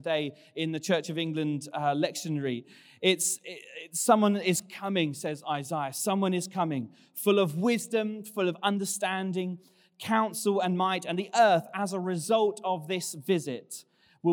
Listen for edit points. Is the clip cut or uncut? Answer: uncut